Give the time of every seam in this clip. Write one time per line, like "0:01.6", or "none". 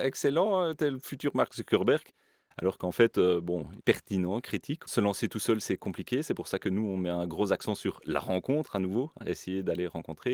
0:03.8
0:04.9